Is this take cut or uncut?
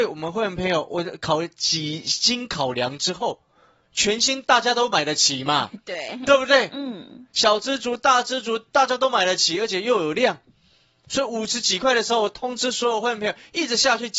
uncut